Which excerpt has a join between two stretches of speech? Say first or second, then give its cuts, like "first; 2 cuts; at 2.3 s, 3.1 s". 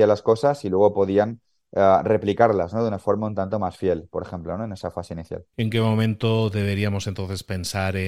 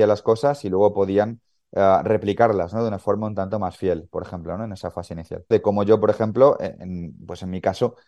second; 1 cut; at 5.5 s